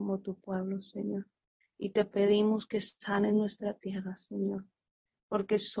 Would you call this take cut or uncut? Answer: cut